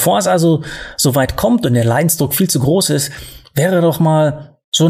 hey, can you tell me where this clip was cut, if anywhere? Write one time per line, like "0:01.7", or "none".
none